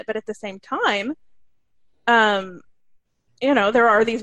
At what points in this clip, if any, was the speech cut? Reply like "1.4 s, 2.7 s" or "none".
none